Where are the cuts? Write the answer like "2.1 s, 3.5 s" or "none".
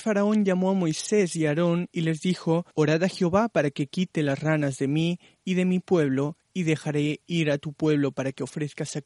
2.7 s